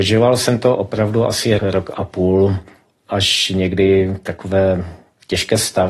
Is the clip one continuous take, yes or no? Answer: no